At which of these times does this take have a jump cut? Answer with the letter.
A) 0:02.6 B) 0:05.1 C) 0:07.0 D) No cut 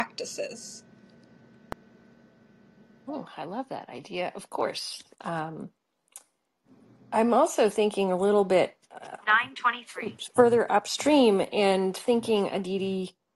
B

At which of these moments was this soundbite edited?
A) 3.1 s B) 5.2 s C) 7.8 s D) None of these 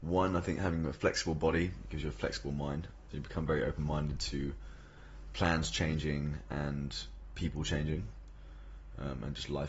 A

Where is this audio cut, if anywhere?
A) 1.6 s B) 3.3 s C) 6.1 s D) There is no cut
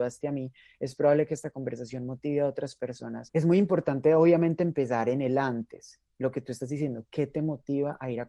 B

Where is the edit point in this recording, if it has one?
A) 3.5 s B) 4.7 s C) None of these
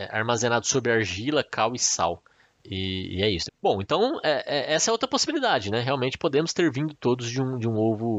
A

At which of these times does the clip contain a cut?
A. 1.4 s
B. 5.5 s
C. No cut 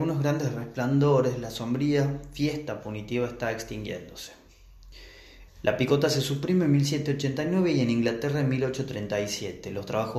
B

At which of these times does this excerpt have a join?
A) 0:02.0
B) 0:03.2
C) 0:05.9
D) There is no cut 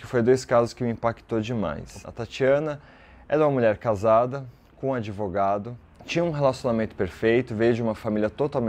A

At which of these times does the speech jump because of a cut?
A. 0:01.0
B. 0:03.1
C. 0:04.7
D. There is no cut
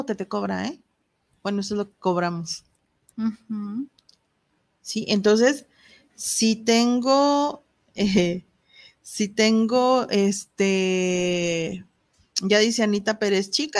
B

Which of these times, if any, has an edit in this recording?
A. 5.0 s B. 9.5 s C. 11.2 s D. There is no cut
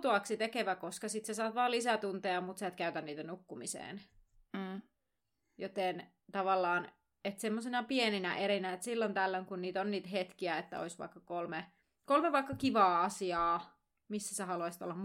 D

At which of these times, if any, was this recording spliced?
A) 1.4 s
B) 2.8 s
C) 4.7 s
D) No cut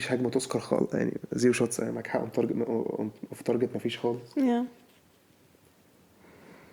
D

